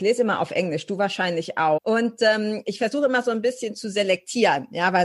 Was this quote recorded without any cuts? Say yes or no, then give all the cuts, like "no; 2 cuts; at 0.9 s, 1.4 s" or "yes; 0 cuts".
no; 1 cut; at 1.8 s